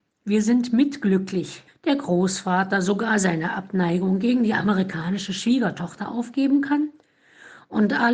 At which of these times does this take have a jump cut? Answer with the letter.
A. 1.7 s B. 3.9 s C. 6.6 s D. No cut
A